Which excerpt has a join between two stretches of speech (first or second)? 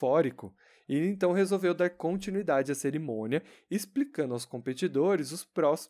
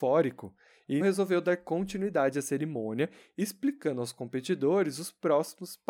second